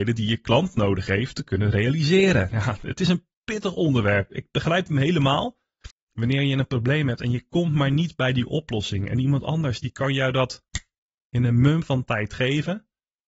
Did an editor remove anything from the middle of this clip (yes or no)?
yes